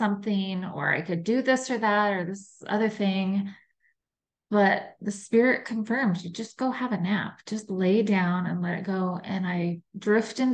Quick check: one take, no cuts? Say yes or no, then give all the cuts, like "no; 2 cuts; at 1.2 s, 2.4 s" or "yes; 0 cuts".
yes; 0 cuts